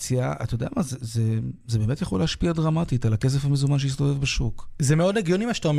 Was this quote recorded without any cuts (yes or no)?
yes